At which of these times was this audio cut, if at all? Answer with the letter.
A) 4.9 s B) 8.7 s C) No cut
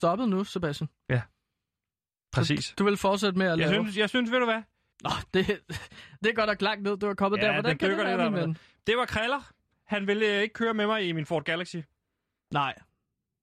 A